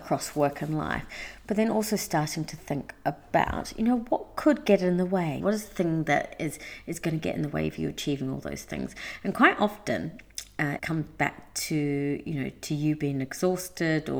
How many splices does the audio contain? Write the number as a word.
two